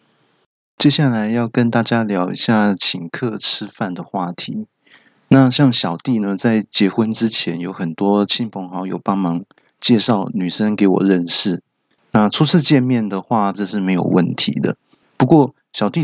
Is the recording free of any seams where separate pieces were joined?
no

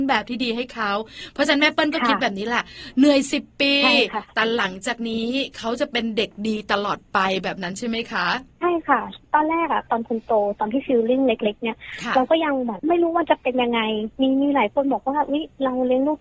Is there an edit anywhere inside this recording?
no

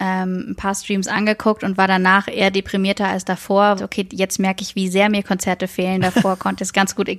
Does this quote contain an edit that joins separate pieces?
yes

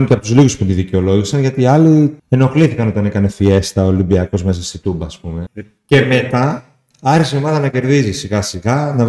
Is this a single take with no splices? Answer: no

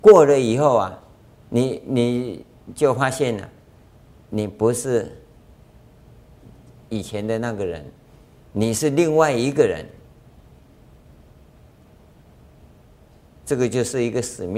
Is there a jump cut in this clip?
no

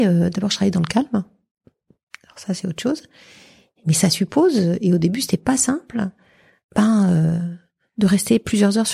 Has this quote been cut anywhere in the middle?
no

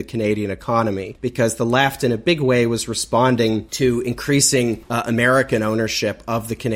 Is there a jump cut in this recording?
no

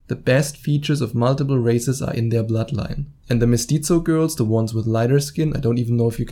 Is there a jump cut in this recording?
no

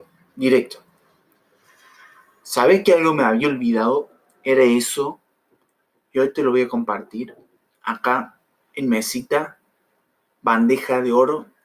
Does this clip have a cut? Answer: no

